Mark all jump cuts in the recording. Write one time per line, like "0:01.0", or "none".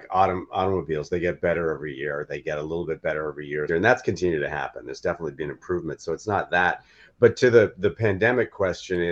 0:03.7